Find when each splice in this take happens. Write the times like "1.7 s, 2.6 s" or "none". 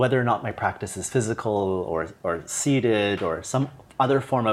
none